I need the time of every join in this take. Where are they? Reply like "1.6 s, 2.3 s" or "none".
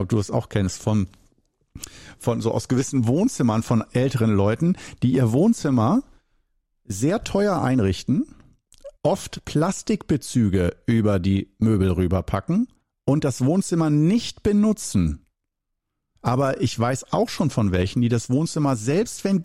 8.9 s, 16.1 s